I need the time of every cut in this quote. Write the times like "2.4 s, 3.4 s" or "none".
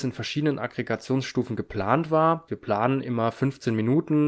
2.5 s